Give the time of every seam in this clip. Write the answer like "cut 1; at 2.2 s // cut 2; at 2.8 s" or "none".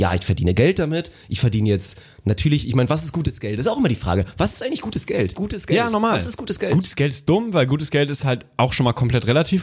cut 1; at 5.3 s